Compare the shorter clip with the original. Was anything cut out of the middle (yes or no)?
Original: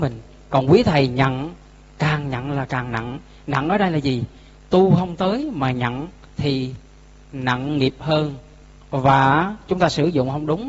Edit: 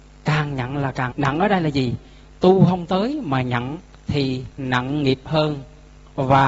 yes